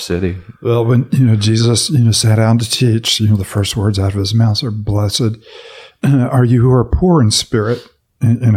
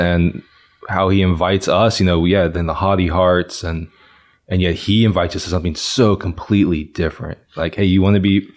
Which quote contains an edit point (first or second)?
second